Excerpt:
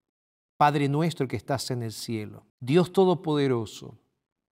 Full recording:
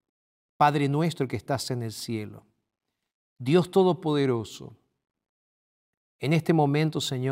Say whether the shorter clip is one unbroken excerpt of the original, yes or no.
no